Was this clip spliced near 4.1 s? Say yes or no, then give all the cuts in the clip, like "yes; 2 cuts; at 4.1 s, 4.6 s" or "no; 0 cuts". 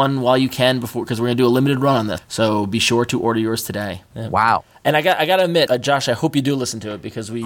yes; 2 cuts; at 4.1 s, 5.7 s